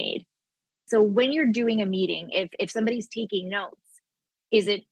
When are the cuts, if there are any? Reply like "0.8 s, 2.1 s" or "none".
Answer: none